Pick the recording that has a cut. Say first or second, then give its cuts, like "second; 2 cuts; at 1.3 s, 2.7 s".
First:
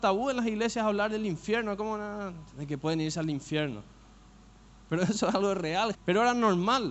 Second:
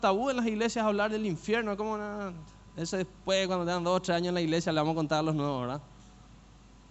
first; 2 cuts; at 2.5 s, 5.9 s